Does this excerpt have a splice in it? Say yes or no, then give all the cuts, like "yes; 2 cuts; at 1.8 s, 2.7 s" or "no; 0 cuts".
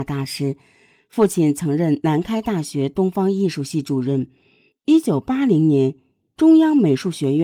yes; 1 cut; at 4.7 s